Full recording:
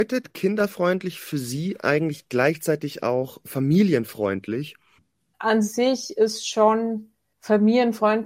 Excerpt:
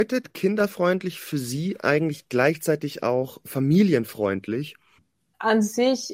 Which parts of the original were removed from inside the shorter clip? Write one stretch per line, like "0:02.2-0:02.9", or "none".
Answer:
none